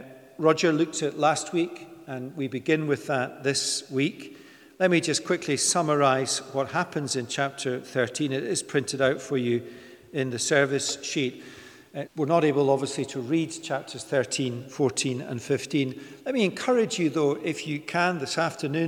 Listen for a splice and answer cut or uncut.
cut